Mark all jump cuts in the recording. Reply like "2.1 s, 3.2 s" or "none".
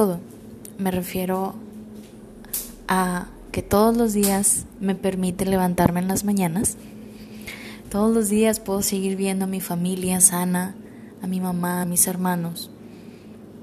7.8 s, 11.8 s